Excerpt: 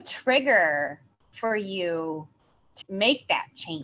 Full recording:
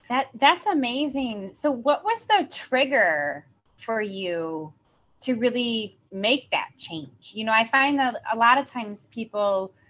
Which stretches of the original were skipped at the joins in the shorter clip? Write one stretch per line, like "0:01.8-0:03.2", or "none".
0:05.3-0:06.0